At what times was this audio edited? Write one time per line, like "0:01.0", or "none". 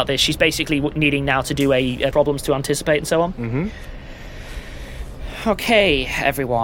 0:02.1